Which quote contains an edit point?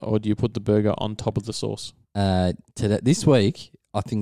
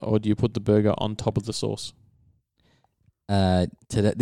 first; 1 cut; at 2.0 s

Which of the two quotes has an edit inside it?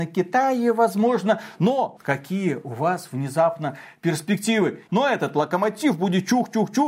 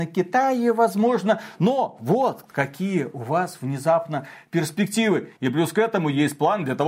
first; 2 cuts; at 2.0 s, 4.9 s

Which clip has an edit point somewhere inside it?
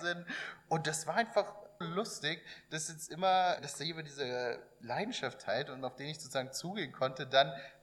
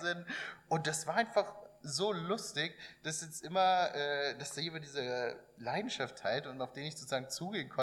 first; 2 cuts; at 1.8 s, 3.6 s

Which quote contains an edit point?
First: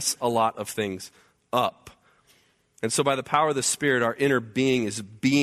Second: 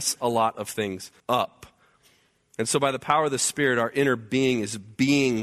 second; 1 cut; at 1.2 s

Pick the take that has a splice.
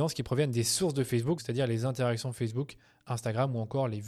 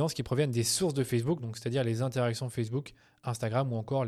first; 1 cut; at 1.4 s

